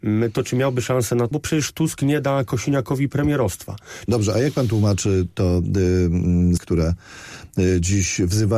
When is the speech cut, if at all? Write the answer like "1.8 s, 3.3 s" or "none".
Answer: 1.3 s, 4.1 s, 6.6 s